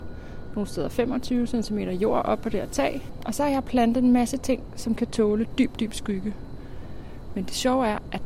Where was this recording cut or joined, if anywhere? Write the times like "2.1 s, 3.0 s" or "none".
none